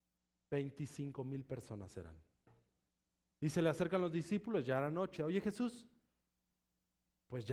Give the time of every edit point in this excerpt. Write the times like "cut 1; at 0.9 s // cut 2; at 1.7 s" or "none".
cut 1; at 3.3 s // cut 2; at 5.2 s